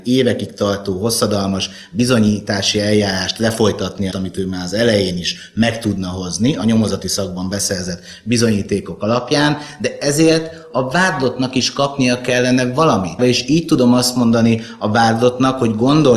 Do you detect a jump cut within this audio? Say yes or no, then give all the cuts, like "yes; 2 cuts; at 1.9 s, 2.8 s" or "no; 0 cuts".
yes; 2 cuts; at 4.1 s, 13.2 s